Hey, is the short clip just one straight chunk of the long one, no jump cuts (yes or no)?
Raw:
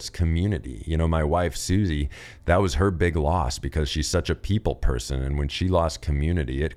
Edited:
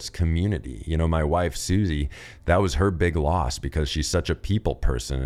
yes